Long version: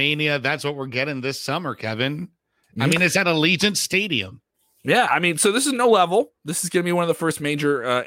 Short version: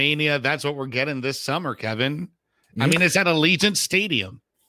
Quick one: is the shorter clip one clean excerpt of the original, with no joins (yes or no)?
yes